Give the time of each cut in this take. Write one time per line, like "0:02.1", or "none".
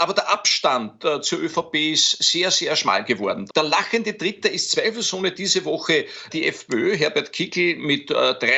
0:03.5
0:06.3